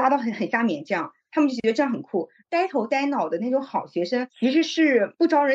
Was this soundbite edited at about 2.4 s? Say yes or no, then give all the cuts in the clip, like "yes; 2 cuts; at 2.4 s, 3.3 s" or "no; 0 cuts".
yes; 1 cut; at 2.4 s